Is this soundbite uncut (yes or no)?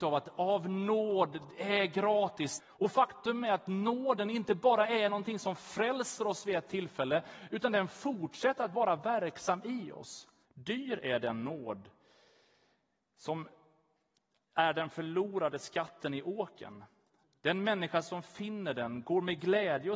no